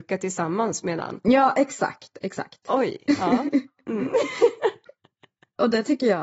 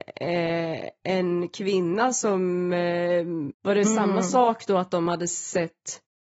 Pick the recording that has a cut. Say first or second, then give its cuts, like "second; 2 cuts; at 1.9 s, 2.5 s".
second; 1 cut; at 3.5 s